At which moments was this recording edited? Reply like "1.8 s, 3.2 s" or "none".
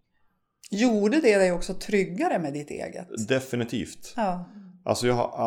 none